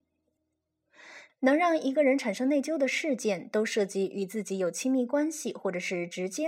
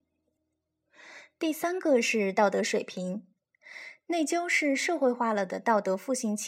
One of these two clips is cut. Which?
first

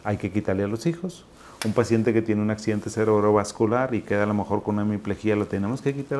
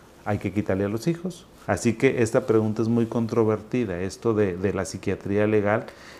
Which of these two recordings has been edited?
second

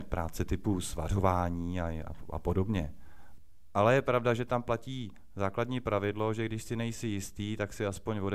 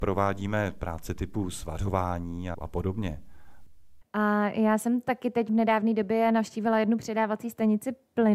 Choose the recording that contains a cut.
second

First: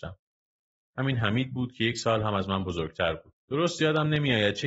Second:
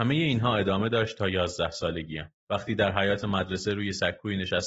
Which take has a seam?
second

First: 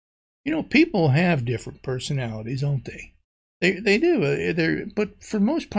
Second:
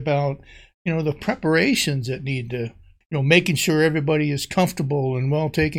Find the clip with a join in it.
second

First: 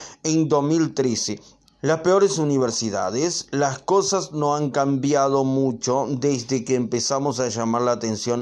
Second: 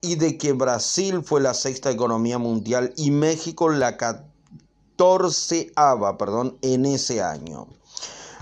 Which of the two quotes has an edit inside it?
first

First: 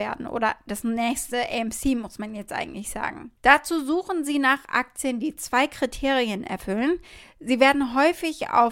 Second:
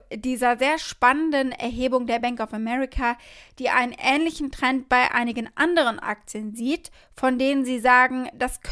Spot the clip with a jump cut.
first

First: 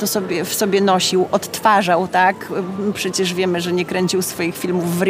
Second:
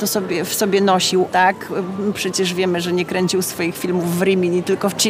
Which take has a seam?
second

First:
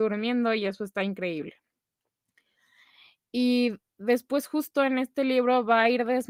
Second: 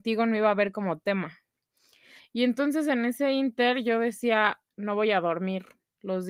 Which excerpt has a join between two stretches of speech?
second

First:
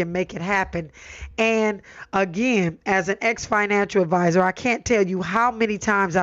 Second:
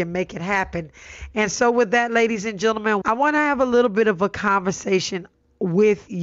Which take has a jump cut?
second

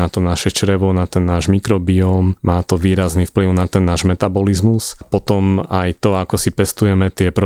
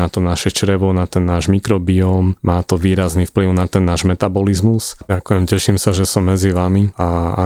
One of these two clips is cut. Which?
second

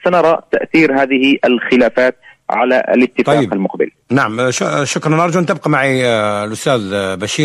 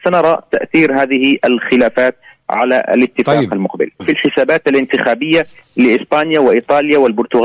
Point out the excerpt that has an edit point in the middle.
second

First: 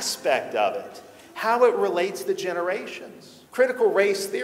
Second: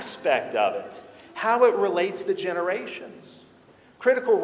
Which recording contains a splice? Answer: first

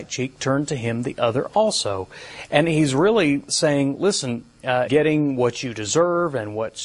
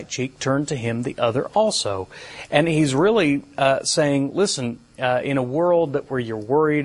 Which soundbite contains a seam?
first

